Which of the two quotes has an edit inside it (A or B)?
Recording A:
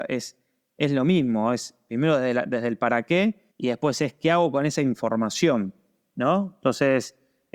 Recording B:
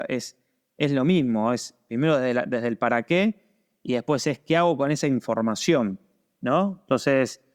A